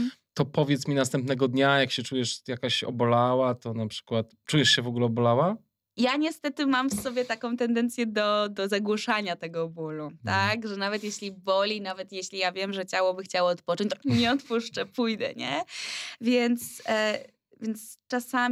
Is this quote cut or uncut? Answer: cut